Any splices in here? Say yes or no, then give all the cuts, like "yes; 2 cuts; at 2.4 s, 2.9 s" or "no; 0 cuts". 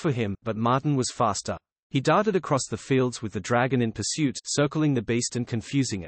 no; 0 cuts